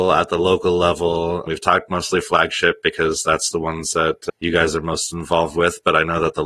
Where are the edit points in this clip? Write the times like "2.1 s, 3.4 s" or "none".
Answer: none